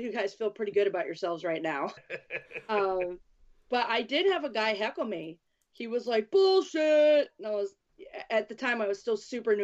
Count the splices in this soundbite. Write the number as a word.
one